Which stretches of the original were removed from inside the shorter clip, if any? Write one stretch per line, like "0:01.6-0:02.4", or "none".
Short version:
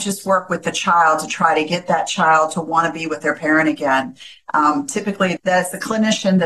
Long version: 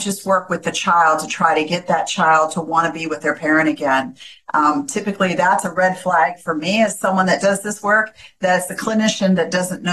0:05.4-0:08.3